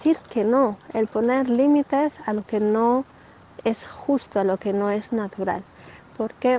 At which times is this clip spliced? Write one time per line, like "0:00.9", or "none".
none